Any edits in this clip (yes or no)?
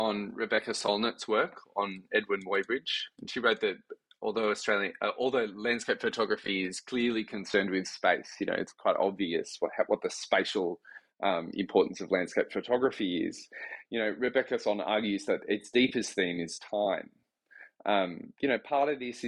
no